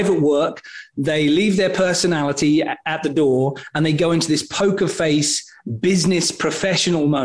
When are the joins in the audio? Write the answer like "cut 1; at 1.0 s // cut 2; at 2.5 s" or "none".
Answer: none

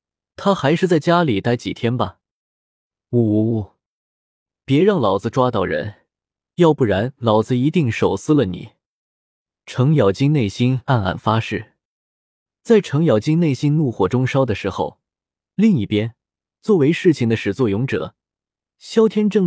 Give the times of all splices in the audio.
none

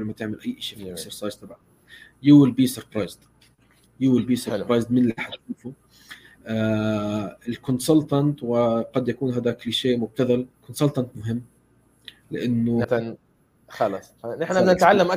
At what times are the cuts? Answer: cut 1; at 10.5 s // cut 2; at 12.8 s

